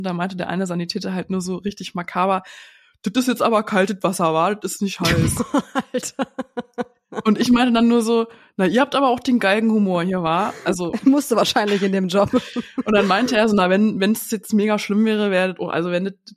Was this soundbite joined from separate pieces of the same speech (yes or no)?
no